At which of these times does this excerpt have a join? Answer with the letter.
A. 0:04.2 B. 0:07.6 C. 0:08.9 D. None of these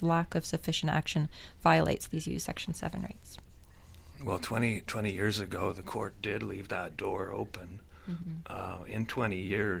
D